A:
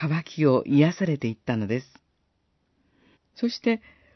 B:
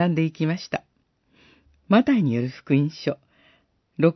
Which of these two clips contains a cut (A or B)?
A